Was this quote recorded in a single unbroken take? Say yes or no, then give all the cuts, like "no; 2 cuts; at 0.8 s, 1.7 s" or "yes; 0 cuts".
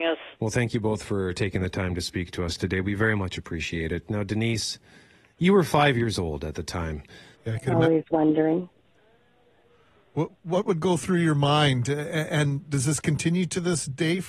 no; 2 cuts; at 7.4 s, 10.3 s